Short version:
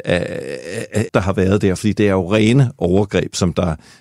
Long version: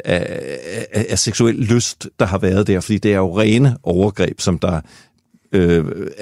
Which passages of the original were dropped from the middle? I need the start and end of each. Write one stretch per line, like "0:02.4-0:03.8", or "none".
0:01.1-0:02.1